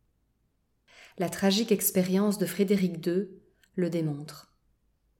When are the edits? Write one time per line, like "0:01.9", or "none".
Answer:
0:03.7